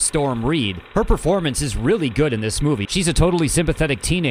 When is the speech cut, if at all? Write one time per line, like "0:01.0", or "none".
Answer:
0:02.8